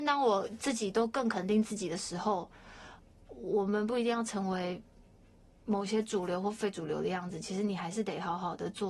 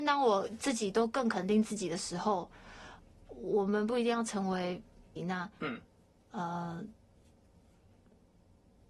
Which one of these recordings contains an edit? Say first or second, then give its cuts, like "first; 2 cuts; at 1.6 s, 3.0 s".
second; 1 cut; at 5.2 s